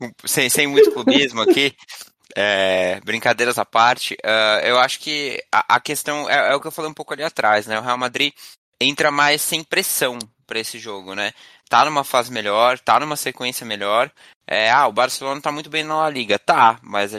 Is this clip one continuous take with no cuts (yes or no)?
yes